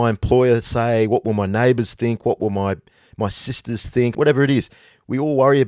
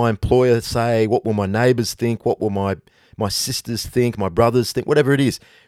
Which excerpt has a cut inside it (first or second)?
first